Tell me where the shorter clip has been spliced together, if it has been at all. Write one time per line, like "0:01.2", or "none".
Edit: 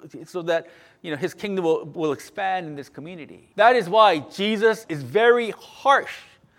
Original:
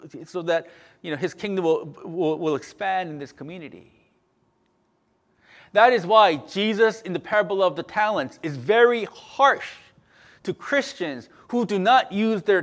0:02.0
0:03.5
0:04.8